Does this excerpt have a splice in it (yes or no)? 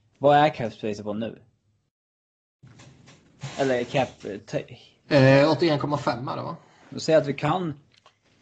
yes